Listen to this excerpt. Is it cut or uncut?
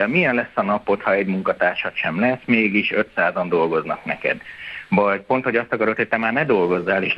uncut